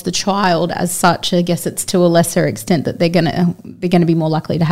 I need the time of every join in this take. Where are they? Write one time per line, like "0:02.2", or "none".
none